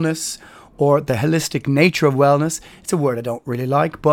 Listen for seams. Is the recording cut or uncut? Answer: uncut